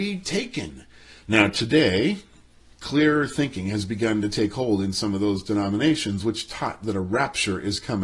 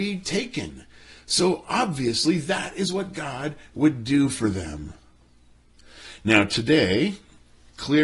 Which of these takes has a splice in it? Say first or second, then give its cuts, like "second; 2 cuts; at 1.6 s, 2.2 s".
first; 1 cut; at 1.2 s